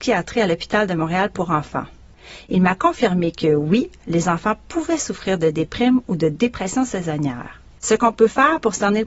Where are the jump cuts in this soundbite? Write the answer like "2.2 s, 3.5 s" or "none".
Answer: 7.8 s